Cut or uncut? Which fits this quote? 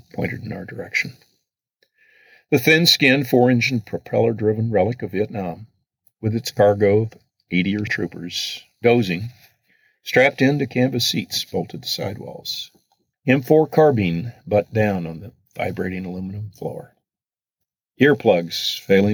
cut